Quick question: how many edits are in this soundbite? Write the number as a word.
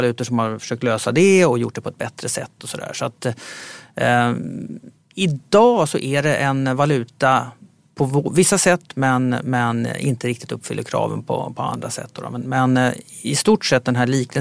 zero